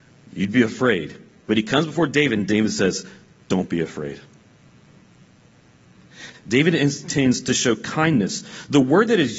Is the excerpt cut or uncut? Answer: cut